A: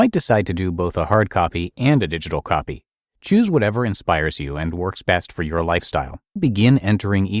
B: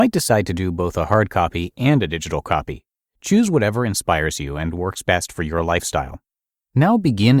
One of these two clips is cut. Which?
A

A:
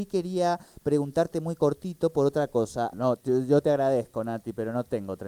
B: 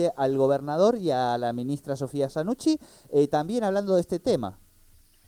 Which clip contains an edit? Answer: A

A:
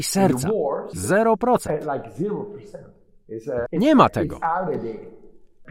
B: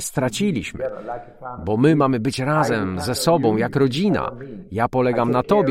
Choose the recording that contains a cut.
A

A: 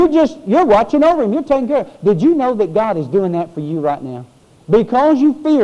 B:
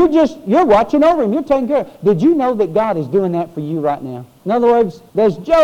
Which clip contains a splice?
B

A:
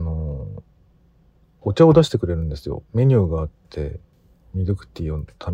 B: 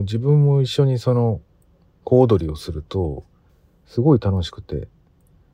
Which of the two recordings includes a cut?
A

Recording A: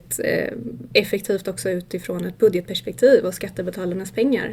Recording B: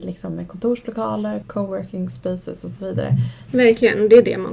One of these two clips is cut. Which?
B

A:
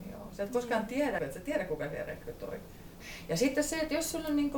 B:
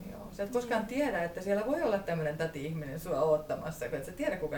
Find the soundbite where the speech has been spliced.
A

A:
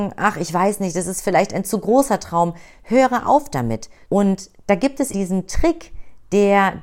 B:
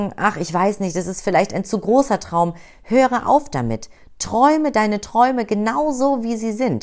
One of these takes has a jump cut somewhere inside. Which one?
A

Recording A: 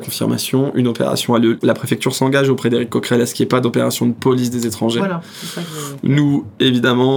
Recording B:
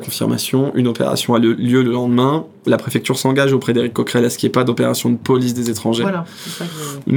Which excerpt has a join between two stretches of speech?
A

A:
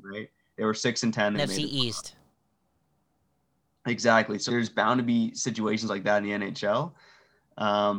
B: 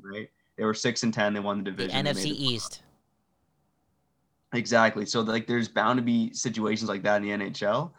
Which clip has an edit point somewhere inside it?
A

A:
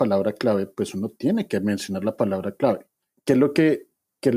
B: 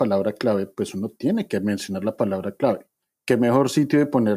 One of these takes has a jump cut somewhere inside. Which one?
A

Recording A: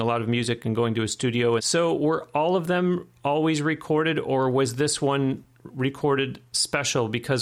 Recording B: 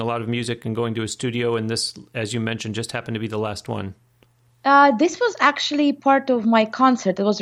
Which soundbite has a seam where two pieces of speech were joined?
A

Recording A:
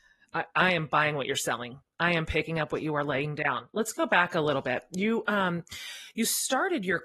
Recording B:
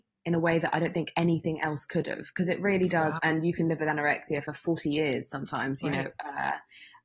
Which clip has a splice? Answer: B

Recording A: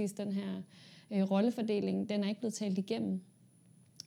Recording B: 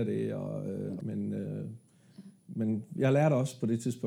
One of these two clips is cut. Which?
B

